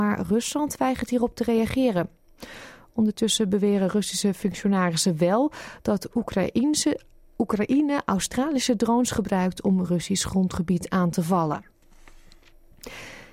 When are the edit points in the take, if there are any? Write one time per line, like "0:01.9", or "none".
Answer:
none